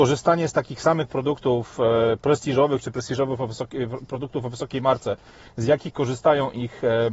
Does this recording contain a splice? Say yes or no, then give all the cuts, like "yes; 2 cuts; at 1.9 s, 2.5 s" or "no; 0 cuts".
no; 0 cuts